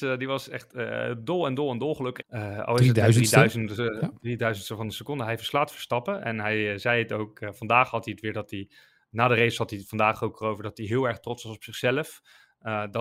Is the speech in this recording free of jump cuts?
no; 1 cut; at 2.2 s

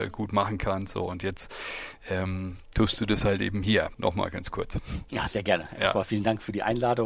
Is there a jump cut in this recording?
yes; 1 cut; at 3.9 s

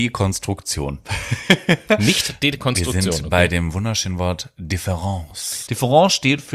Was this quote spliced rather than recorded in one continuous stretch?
yes; 1 cut; at 5.7 s

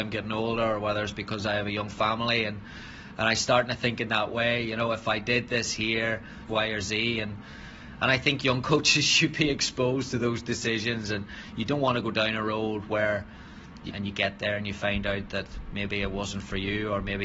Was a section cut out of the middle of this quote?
yes; 2 cuts; at 6.5 s, 13.9 s

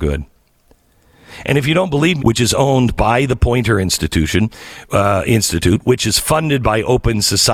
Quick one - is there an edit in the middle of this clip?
yes; 1 cut; at 2.2 s

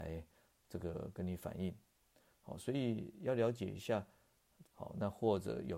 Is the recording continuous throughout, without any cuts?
no; 1 cut; at 4.6 s

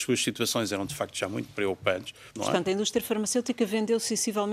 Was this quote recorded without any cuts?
yes; 0 cuts

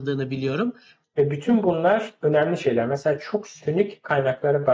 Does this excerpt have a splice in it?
yes; 1 cut; at 1.0 s

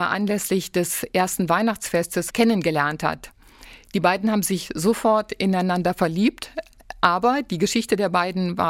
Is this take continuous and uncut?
no; 1 cut; at 2.3 s

